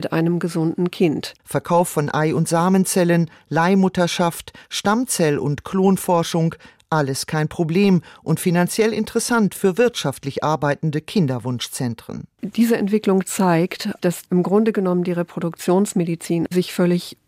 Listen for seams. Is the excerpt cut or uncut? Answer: cut